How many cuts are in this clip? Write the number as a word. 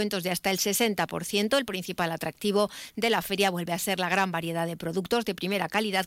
zero